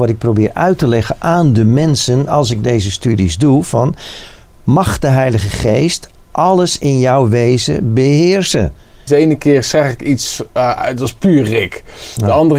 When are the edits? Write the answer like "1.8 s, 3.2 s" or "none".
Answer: 9.1 s